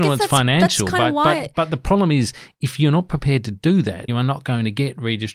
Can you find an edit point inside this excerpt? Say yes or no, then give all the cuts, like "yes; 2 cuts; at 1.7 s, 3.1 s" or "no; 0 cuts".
yes; 1 cut; at 4.1 s